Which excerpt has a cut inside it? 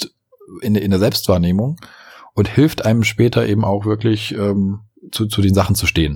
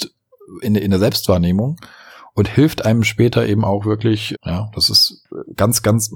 second; 1 cut; at 4.3 s

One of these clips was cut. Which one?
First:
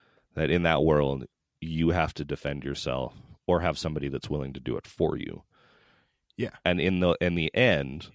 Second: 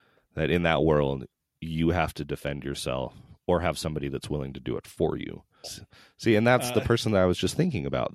second; 1 cut; at 5.6 s

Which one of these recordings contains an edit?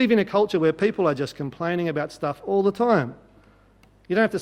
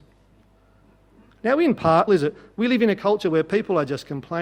second; 1 cut; at 2.1 s

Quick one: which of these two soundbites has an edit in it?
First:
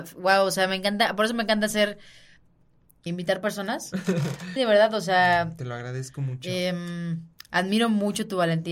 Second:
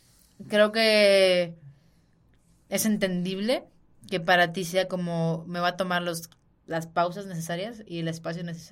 first; 2 cuts; at 3.1 s, 4.6 s

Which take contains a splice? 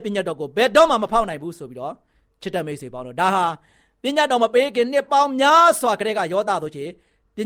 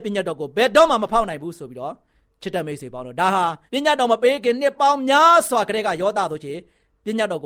second; 1 cut; at 3.7 s

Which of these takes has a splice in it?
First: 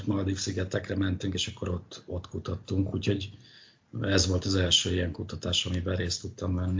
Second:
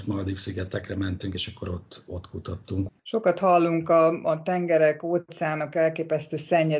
second; 1 cut; at 2.9 s

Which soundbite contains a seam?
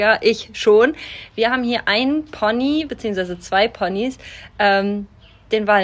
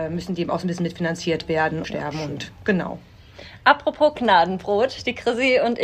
second; 1 cut; at 1.8 s

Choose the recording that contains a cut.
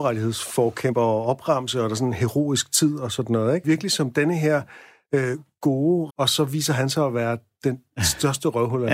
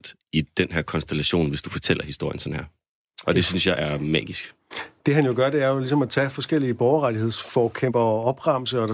first; 2 cuts; at 3.6 s, 6.1 s

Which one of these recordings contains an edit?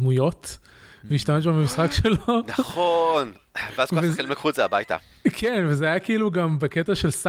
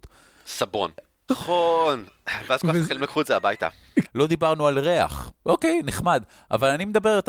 second; 3 cuts; at 1.3 s, 4.0 s, 5.4 s

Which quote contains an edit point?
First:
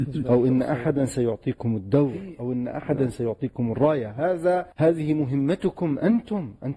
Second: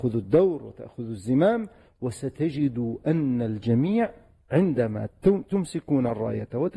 first; 1 cut; at 4.7 s

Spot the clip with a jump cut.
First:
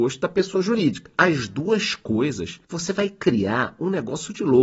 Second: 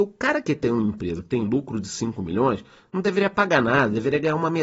first; 2 cuts; at 1.2 s, 2.6 s

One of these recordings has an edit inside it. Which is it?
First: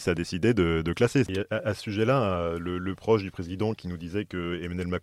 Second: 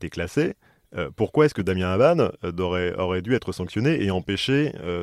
first; 1 cut; at 1.3 s

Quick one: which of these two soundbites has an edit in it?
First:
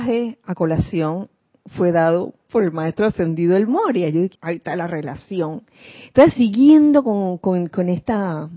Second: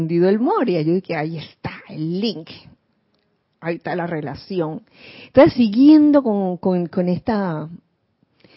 first; 1 cut; at 4.3 s

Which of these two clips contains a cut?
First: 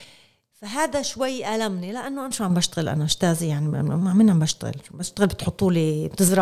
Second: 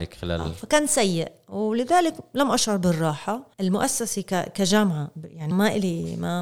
second; 2 cuts; at 3.5 s, 5.5 s

